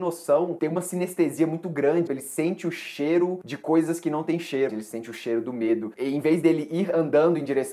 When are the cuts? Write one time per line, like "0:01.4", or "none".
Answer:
0:02.1
0:04.7